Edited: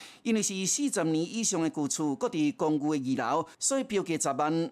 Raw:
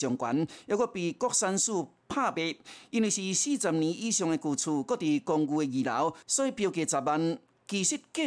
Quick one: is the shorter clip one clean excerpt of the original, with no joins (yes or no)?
yes